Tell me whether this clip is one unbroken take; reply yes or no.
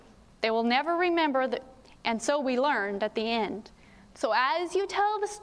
no